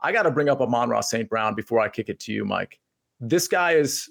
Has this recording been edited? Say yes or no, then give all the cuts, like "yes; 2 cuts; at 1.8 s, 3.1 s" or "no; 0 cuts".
no; 0 cuts